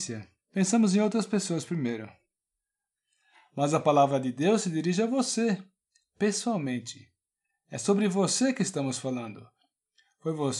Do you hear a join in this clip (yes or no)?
no